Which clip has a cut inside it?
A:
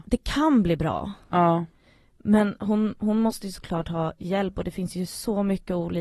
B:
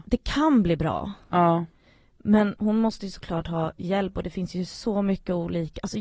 B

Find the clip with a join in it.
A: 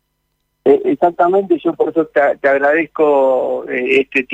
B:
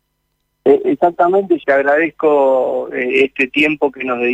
B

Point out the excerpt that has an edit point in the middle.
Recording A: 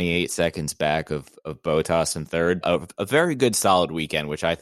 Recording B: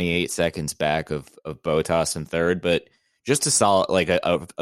A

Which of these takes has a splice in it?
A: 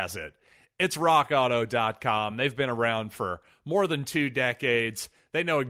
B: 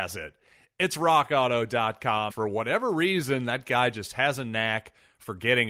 B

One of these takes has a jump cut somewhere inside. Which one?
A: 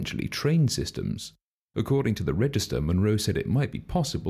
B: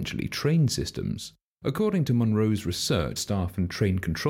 B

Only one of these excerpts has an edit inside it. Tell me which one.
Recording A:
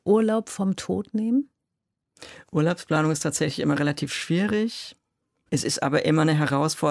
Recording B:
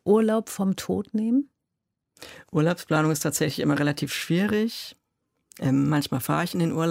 A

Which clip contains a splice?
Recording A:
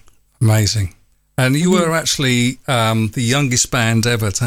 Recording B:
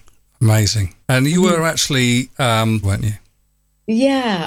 B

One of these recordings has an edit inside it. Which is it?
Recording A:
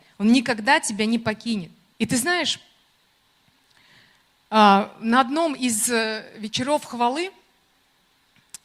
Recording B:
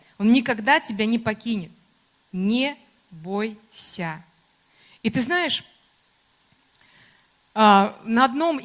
A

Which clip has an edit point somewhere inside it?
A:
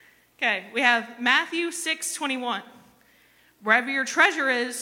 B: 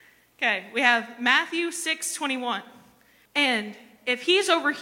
B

